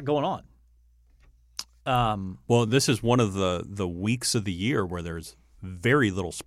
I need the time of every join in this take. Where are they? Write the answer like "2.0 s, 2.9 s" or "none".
none